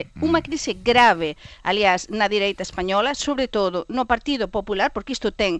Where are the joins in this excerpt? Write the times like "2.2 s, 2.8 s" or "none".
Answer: none